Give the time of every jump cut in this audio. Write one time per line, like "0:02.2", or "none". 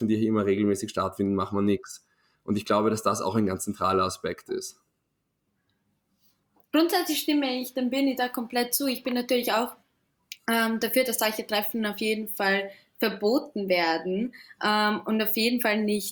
none